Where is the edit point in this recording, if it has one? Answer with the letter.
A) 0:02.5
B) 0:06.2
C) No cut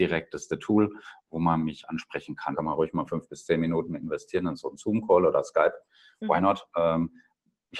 A